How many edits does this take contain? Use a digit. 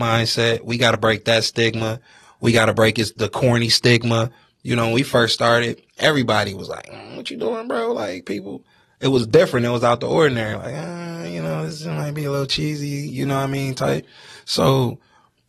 1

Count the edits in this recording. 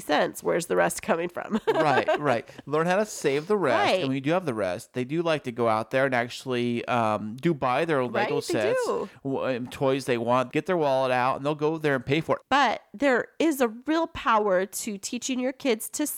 2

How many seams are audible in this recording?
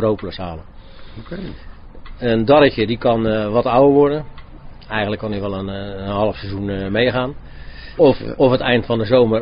2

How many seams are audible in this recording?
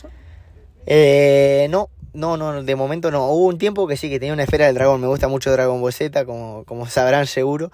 0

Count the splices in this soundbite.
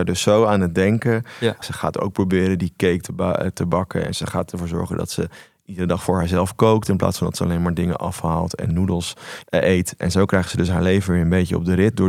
2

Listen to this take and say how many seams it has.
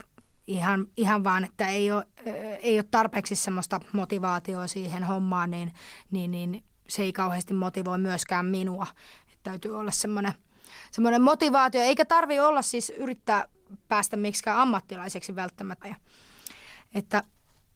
1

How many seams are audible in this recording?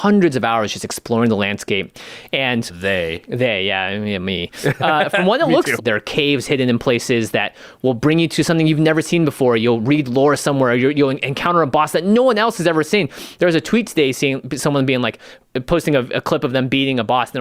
1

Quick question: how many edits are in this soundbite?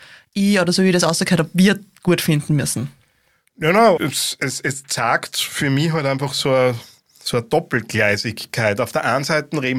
1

